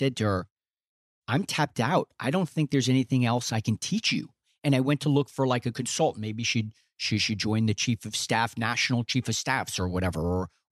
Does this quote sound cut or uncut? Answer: uncut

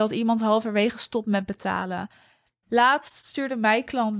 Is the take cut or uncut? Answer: cut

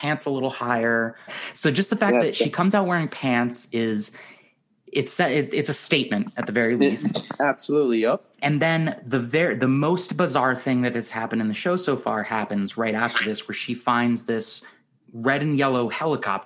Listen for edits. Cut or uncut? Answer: cut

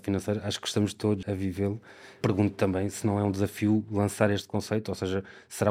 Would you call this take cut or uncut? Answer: cut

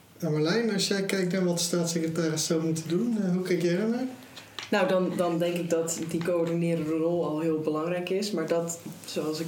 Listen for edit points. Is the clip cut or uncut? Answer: uncut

